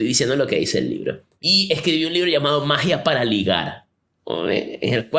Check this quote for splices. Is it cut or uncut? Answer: cut